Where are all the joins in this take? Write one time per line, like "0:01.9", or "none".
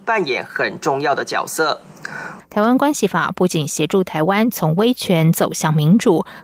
0:02.4